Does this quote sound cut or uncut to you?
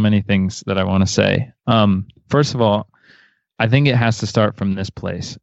uncut